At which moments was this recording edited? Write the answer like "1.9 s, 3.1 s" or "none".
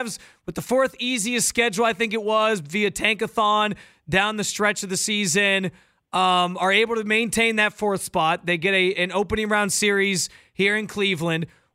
none